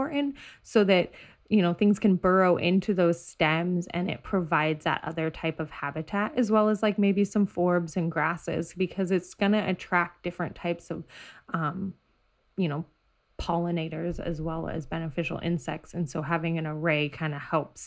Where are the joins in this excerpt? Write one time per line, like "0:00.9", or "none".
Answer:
none